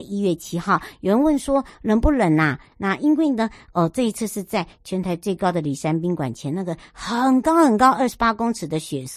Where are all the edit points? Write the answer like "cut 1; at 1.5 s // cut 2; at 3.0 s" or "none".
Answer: cut 1; at 2.7 s